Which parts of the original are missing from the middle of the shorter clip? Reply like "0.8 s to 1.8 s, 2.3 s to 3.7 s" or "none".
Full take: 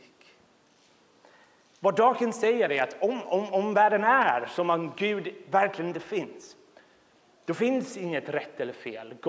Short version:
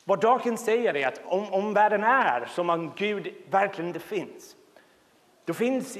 3.0 s to 3.2 s